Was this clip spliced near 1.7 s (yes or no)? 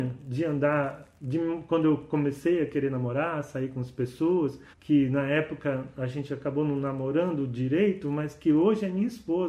no